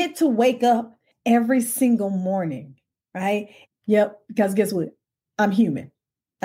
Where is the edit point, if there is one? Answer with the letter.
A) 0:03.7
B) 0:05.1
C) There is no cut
A